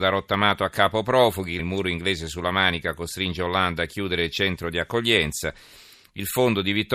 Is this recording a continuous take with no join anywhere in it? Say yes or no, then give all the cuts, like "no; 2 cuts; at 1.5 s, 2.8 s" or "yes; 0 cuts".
no; 1 cut; at 1.6 s